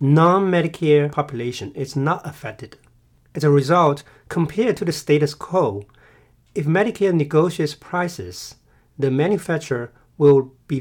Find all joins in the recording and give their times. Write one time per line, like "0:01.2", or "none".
none